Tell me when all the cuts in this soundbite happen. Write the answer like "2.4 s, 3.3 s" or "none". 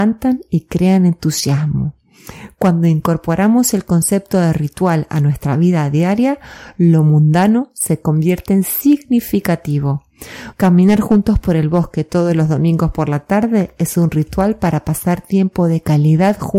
10.5 s